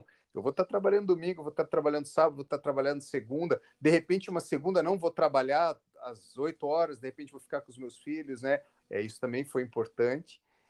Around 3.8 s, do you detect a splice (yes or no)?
no